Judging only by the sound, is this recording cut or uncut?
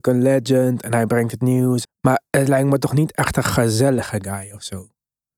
cut